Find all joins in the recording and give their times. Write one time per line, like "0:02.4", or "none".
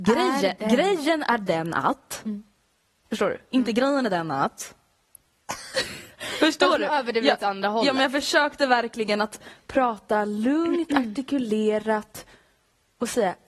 none

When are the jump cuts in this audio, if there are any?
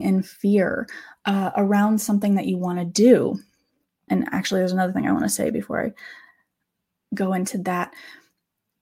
0:04.1

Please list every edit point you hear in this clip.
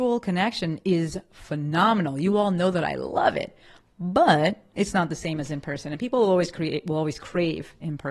none

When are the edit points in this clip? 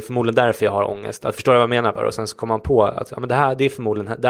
0:02.0

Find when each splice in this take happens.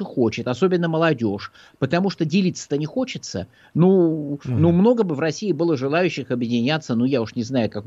none

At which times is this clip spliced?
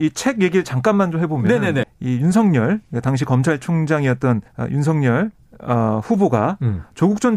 0:01.8
0:04.5

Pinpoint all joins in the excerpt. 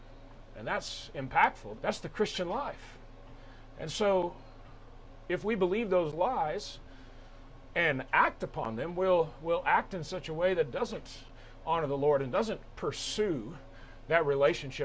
0:01.7

